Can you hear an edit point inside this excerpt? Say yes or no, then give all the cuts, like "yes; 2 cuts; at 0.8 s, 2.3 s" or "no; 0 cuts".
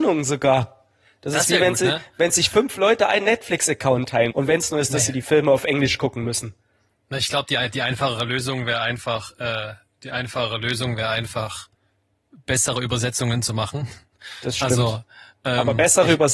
yes; 1 cut; at 4.3 s